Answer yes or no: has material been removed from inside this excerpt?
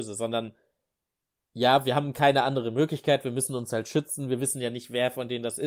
no